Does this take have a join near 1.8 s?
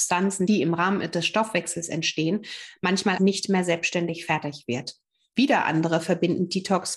no; 2 cuts; at 3.2 s, 5.3 s

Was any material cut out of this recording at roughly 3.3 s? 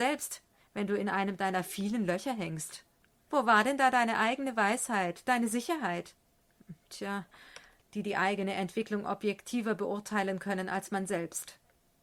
yes; 2 cuts; at 3.3 s, 7.8 s

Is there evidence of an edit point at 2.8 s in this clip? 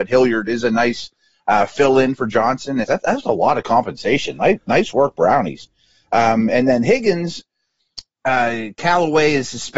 yes; 1 cut; at 2.8 s

